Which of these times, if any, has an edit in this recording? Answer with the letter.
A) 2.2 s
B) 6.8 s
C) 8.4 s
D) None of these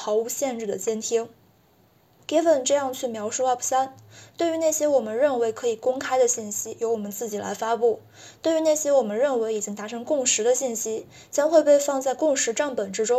A